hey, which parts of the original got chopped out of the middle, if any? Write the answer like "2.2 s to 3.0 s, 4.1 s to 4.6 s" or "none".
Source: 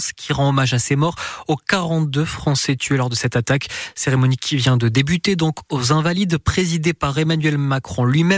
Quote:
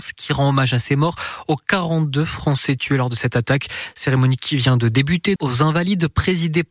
5.4 s to 5.7 s